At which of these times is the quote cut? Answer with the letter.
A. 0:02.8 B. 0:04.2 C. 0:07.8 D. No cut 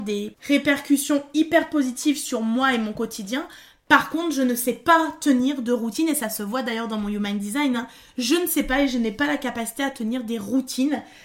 D